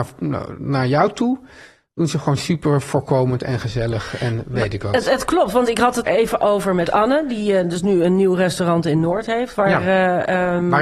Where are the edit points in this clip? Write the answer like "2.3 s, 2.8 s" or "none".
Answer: 6.1 s